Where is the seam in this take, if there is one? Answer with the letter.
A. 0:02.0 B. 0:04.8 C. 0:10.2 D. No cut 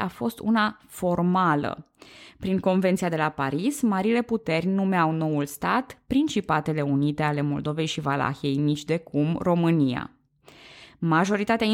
D